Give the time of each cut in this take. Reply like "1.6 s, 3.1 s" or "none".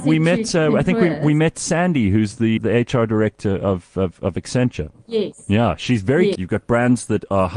2.6 s, 6.4 s